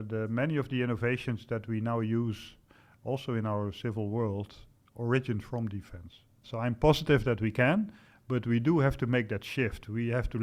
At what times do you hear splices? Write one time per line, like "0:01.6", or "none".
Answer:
0:06.4